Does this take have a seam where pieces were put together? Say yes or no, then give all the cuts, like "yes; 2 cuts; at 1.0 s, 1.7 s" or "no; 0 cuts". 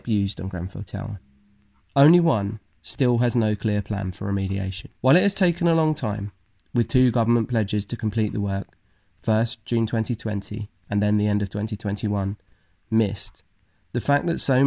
yes; 2 cuts; at 1.8 s, 5.0 s